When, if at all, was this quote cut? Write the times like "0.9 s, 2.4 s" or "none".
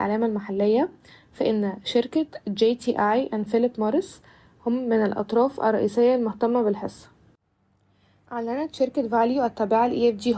none